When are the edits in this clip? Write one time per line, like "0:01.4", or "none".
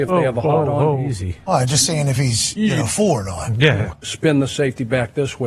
0:03.9